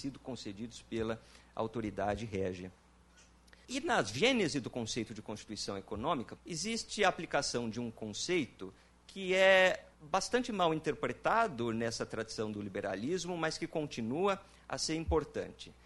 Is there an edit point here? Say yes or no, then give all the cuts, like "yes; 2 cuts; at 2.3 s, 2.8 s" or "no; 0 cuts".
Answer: yes; 3 cuts; at 3.6 s, 6.4 s, 9.9 s